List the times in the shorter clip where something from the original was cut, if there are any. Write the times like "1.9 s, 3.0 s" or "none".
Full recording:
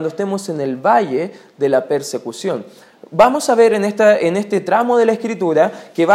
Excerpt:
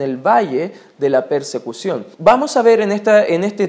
2.1 s